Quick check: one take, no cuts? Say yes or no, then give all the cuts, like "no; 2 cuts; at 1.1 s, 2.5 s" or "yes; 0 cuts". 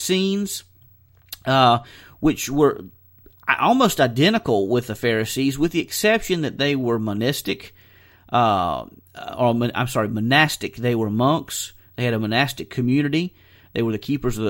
yes; 0 cuts